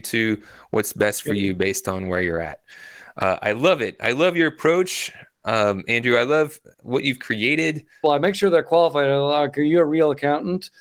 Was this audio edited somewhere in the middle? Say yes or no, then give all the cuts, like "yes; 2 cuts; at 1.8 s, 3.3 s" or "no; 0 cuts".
yes; 1 cut; at 8.0 s